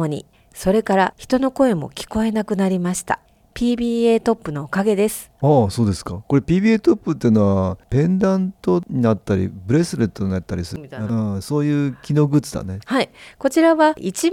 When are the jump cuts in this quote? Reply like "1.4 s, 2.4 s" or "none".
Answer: 5.4 s, 12.8 s